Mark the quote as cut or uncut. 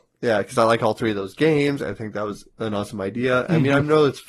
uncut